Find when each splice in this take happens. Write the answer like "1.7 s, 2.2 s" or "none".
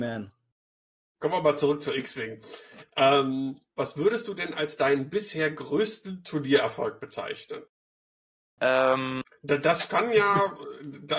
8.6 s